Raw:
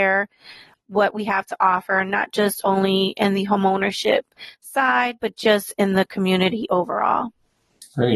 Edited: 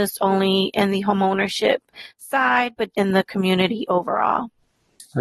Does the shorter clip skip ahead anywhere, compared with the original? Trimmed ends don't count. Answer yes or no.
yes